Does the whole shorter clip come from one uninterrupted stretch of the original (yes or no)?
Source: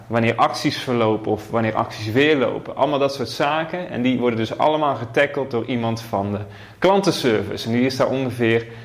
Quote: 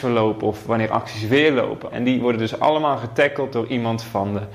no